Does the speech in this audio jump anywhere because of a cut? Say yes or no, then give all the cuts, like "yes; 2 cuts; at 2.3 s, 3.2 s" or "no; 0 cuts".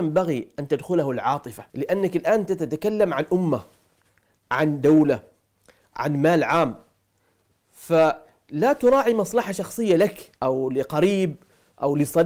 yes; 2 cuts; at 1.7 s, 10.4 s